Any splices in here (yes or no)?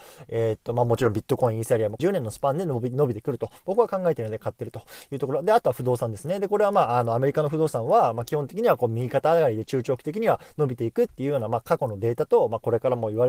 yes